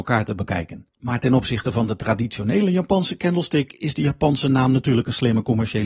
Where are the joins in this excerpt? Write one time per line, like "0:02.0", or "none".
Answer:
0:00.9